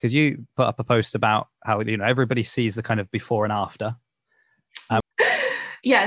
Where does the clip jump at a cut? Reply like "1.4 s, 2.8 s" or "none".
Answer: 5.0 s

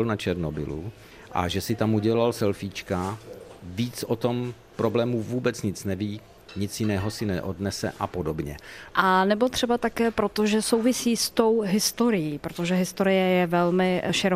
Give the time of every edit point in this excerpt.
8.9 s

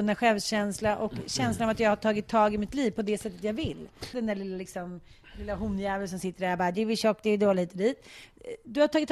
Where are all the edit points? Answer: 4.1 s

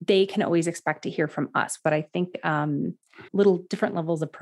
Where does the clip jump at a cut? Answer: 1.8 s, 3.3 s

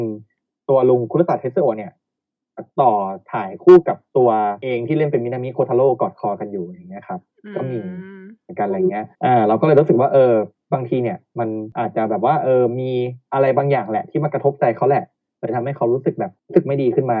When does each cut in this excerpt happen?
9.1 s

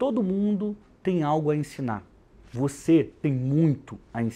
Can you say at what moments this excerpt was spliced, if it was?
none

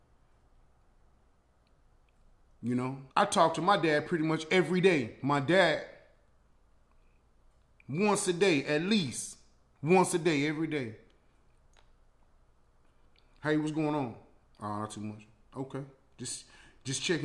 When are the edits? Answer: 3.1 s

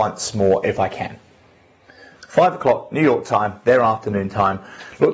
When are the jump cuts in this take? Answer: 2.1 s

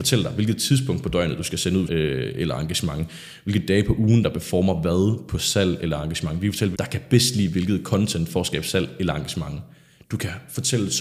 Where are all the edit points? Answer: 1.9 s, 6.7 s

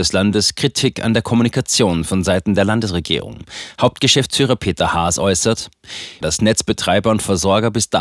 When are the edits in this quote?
6.2 s

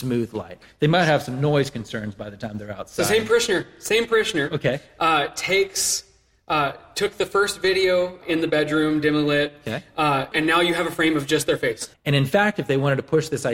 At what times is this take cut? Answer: 8.2 s, 10.3 s, 11.9 s

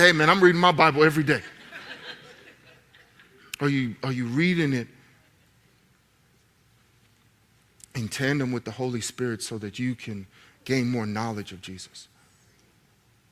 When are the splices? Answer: none

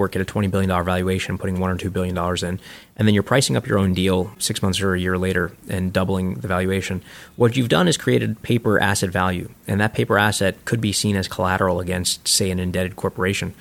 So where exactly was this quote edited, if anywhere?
none

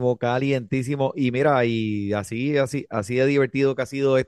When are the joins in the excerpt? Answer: none

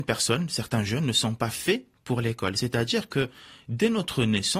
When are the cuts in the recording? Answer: none

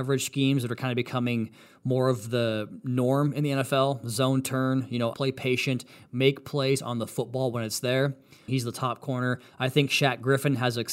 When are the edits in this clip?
5.1 s, 8.5 s

